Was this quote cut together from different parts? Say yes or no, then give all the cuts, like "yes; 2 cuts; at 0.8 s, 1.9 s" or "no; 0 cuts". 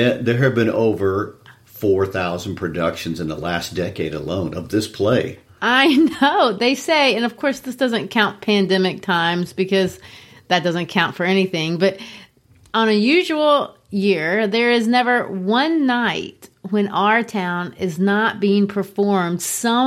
no; 0 cuts